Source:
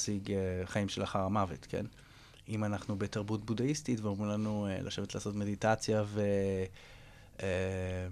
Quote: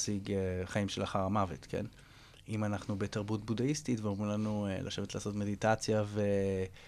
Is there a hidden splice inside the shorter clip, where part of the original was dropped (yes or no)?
no